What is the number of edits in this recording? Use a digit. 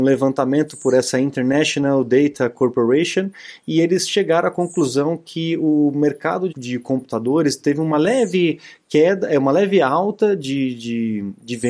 1